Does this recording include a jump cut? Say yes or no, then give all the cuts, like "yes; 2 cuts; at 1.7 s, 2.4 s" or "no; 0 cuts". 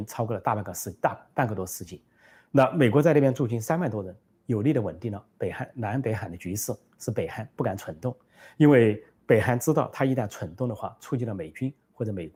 no; 0 cuts